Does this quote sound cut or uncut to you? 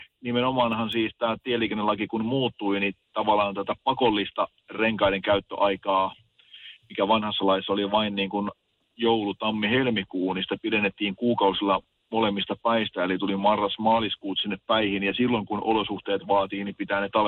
uncut